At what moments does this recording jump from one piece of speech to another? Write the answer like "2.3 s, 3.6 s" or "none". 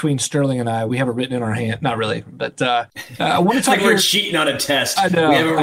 none